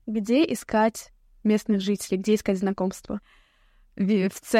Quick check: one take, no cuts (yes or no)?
yes